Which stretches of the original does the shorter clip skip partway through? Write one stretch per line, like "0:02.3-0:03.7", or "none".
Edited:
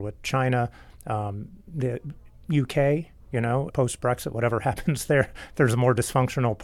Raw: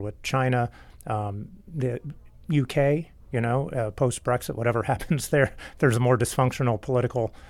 0:03.7-0:03.9